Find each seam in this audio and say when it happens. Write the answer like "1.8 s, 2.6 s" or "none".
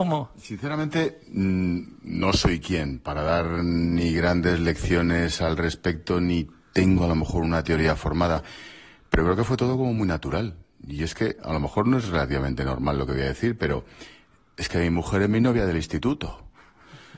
none